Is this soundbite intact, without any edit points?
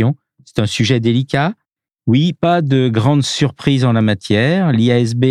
no; 1 cut; at 1.9 s

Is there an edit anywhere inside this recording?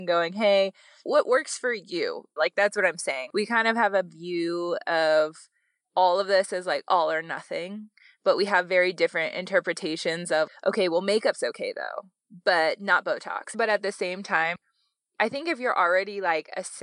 yes; 2 cuts; at 2.4 s, 13.5 s

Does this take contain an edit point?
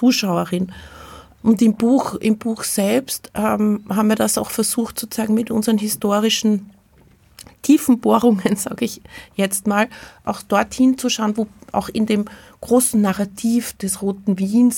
no; 0 cuts

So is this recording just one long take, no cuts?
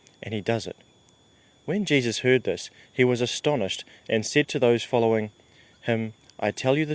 yes; 0 cuts

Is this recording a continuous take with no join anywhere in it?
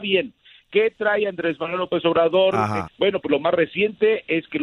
no; 1 cut; at 2.9 s

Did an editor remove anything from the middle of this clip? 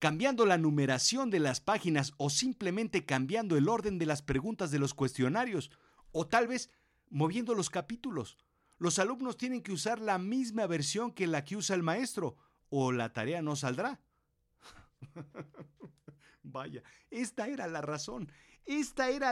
no; 0 cuts

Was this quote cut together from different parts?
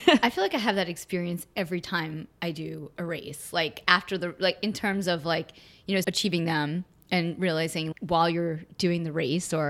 yes; 2 cuts; at 6.0 s, 7.9 s

